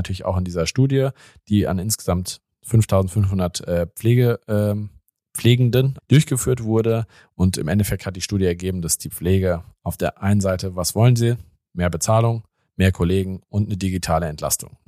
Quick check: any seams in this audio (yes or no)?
yes